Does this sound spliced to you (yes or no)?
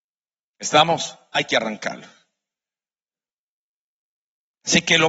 no